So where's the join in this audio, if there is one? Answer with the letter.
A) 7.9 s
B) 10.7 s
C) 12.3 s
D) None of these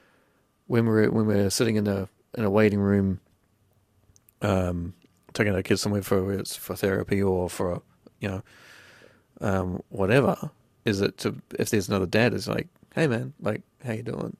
D